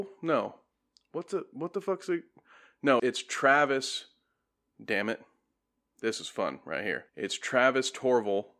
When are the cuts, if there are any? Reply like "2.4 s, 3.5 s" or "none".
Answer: 3.0 s, 7.1 s